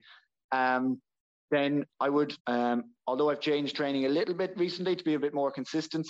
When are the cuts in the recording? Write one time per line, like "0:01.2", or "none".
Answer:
0:02.4